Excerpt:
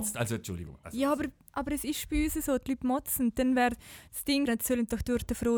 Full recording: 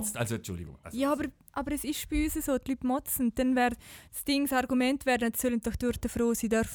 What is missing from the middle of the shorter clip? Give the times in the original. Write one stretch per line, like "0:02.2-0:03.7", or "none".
0:04.5-0:05.2